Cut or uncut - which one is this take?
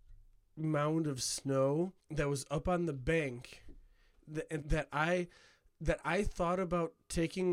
cut